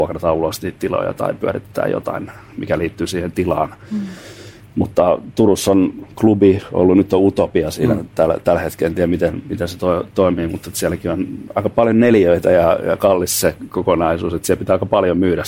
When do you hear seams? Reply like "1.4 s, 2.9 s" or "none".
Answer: 6.0 s